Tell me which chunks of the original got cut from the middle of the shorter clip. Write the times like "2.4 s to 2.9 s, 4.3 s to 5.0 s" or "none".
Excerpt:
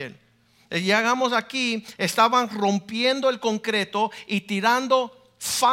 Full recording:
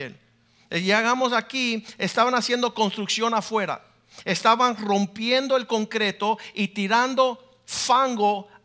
2.0 s to 4.2 s